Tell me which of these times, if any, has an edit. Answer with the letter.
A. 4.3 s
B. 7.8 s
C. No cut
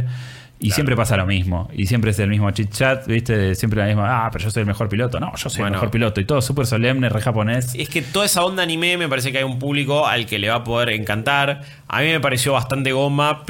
C